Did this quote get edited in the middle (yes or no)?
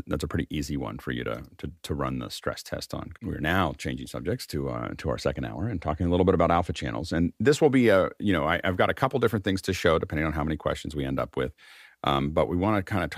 yes